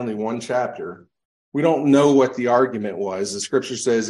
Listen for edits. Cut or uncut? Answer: cut